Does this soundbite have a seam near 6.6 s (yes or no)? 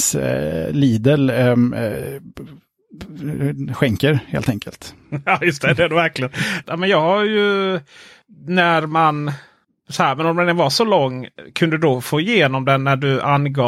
yes